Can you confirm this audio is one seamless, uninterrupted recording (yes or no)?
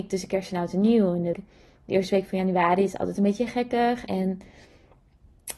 no